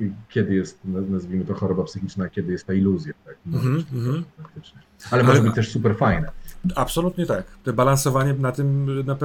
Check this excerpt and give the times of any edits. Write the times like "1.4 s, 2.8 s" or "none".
none